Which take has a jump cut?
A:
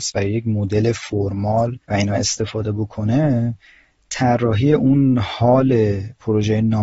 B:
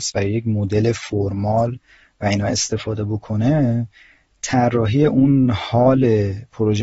A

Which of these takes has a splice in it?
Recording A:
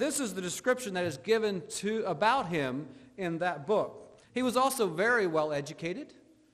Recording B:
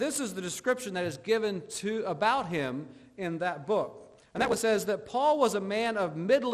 A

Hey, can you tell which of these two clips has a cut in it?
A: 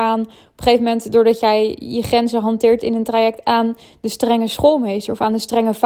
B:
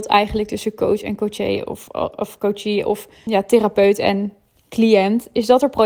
B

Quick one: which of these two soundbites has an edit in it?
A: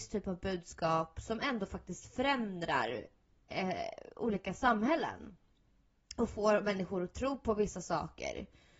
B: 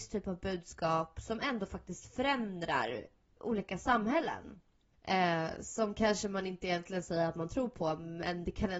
B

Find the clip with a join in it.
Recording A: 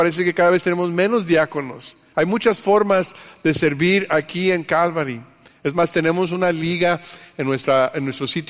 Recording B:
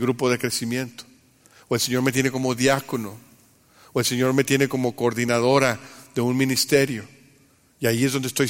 A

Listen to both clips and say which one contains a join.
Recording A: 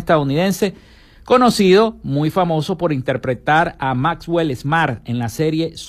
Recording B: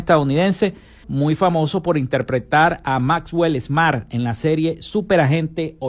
B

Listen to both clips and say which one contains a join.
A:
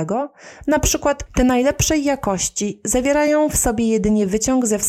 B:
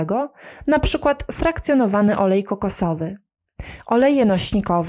A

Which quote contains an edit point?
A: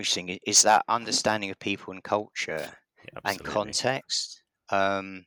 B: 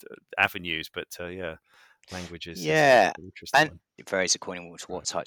B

